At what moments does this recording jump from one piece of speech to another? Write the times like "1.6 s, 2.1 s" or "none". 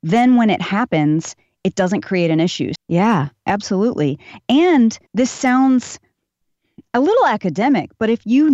2.7 s, 5.1 s